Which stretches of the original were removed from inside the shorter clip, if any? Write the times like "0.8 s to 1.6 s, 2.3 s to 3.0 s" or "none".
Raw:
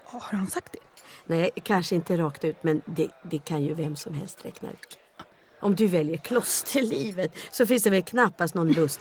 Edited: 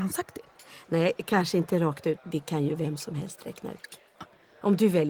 2.6 s to 3.2 s